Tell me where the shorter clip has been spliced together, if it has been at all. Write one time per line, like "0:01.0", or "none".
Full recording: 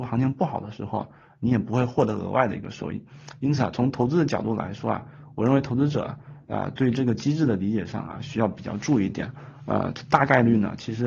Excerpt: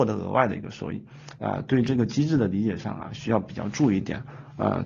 0:01.4